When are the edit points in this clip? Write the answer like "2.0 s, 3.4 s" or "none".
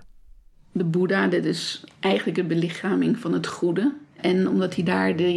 4.1 s